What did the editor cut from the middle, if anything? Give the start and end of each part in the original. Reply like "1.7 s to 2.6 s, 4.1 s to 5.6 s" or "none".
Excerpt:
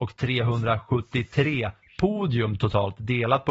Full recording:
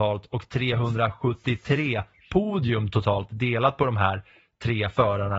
none